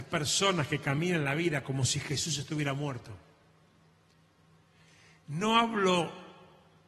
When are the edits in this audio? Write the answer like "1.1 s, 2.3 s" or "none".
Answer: none